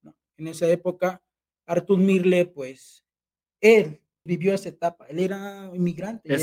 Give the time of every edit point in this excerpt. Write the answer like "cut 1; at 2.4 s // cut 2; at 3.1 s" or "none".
cut 1; at 4.3 s